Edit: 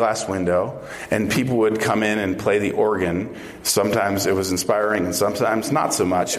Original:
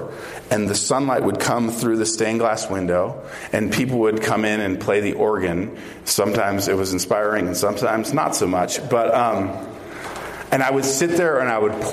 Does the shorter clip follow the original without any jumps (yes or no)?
yes